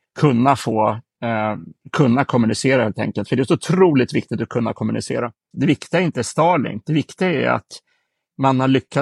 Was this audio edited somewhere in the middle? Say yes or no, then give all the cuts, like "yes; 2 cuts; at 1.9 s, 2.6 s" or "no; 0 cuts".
yes; 1 cut; at 5.5 s